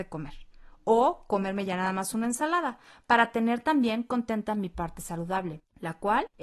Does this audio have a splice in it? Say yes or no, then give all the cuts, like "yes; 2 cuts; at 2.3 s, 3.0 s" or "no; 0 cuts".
no; 0 cuts